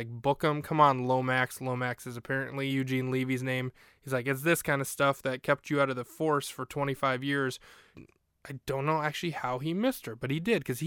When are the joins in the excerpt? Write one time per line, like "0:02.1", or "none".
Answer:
0:07.9